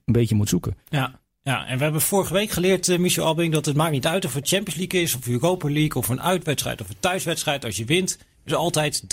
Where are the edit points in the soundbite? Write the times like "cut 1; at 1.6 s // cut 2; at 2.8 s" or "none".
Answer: none

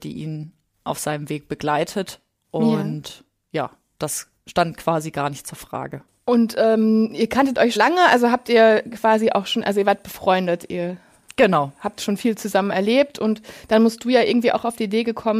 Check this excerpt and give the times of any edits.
cut 1; at 7.8 s

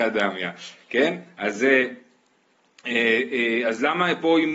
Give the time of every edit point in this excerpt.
none

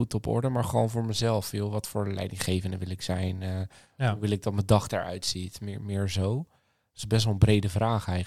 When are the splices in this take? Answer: none

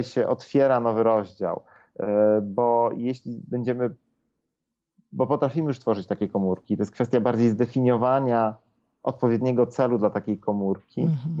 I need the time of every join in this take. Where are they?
none

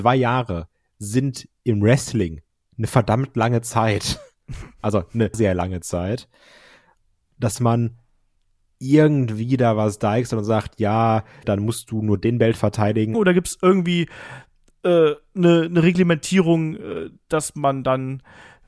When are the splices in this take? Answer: cut 1; at 5.3 s // cut 2; at 11.4 s // cut 3; at 13.1 s

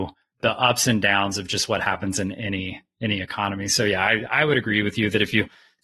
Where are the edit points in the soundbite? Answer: none

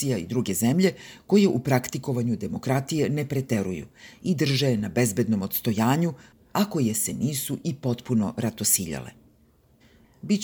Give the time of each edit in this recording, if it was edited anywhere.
none

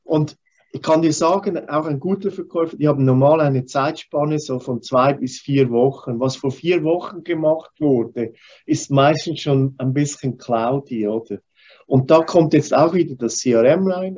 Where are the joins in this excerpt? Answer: none

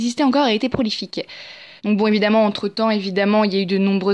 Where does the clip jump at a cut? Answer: cut 1; at 1.8 s

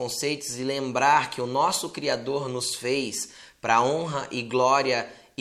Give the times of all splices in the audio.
none

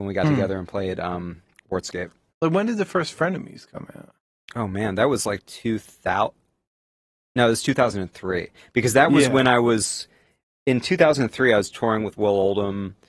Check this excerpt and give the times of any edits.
cut 1; at 2.3 s

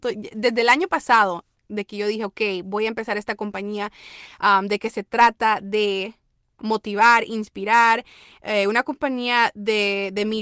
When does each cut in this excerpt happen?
none

